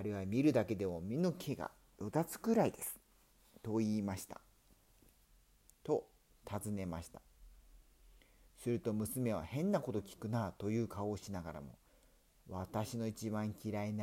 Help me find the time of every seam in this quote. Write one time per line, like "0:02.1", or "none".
0:05.2
0:11.9